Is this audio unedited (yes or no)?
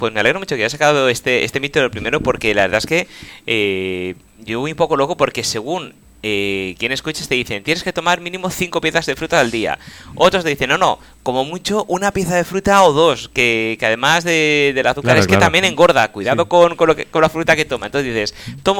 yes